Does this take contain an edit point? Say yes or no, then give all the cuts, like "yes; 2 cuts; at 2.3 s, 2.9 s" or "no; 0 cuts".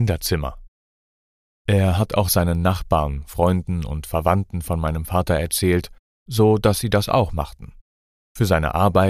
yes; 1 cut; at 1.5 s